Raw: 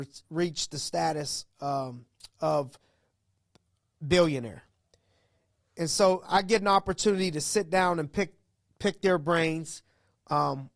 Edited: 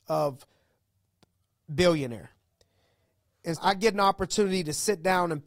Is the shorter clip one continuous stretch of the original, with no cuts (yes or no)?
no